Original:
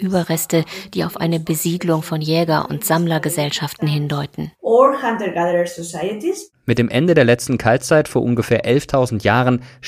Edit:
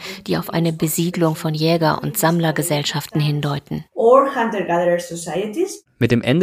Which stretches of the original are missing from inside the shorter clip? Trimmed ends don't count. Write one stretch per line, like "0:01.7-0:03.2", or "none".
none